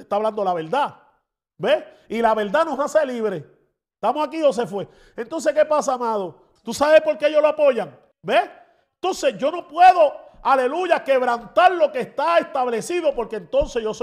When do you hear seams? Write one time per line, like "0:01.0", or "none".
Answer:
0:06.6
0:08.1